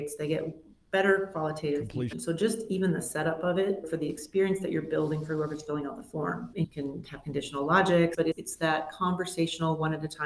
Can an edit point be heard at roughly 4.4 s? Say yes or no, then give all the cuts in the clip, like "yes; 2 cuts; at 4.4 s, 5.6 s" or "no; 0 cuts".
no; 2 cuts; at 2.1 s, 8.1 s